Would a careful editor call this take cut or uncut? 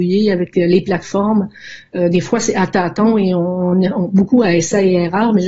uncut